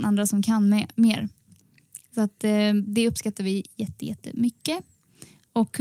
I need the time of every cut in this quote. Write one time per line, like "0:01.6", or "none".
none